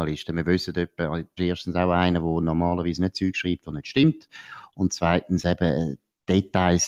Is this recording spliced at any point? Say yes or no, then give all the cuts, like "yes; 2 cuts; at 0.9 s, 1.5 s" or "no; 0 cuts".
yes; 1 cut; at 1.4 s